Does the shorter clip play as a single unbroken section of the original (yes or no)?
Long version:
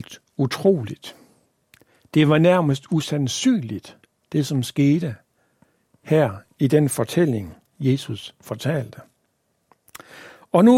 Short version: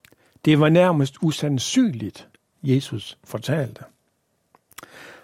no